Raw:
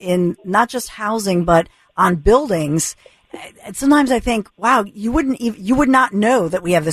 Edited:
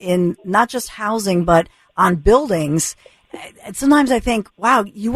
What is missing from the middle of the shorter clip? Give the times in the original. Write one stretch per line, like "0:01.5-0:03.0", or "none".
none